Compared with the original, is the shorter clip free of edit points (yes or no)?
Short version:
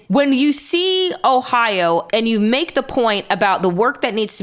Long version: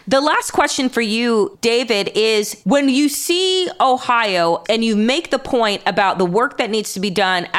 yes